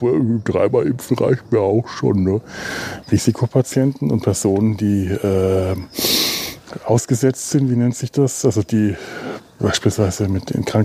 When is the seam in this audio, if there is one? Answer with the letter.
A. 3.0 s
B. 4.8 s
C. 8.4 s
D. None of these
A